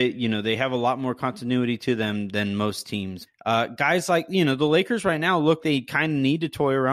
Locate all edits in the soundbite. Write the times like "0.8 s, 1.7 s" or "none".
3.3 s, 5.6 s